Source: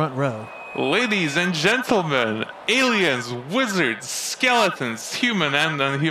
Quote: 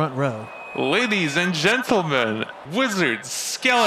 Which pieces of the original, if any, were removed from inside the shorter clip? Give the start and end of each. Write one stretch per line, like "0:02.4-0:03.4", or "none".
0:02.7-0:03.4